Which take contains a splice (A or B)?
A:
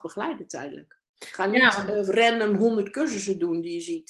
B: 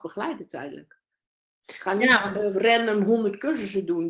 A